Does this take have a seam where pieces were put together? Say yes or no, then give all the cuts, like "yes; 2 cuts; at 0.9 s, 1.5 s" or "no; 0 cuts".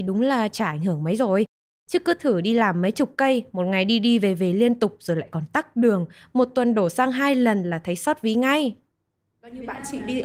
no; 0 cuts